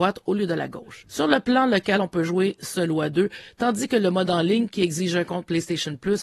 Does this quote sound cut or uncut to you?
uncut